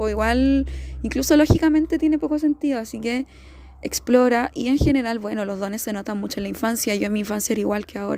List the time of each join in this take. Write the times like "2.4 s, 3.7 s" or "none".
none